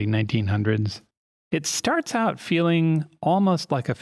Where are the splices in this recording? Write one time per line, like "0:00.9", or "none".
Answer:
none